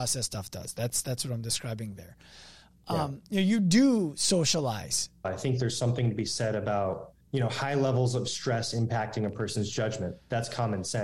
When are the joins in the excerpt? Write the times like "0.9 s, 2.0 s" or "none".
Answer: 5.2 s, 7.2 s